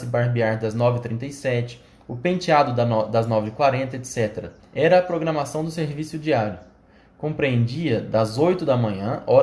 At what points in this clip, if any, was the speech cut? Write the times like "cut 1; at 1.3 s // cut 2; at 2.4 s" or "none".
cut 1; at 4.6 s